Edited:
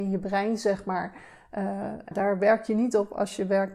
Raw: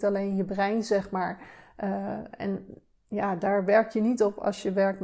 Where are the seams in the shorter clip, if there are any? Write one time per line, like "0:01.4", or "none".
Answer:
0:02.1